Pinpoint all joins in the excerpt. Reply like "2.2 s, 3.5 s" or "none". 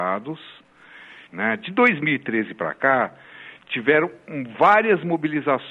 1.3 s